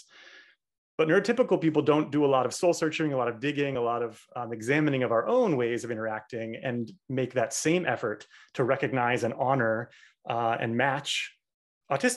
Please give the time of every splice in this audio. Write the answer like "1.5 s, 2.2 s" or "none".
none